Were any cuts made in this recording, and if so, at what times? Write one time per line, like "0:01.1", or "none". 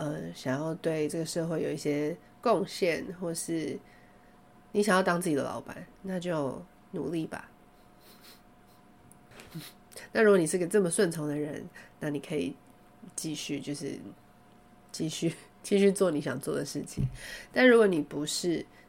0:05.9
0:09.5